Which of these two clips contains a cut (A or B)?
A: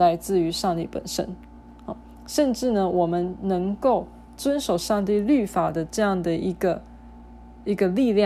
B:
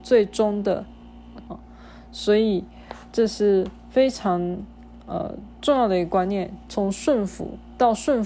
B